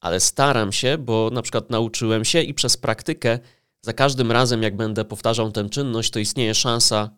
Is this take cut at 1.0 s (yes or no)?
no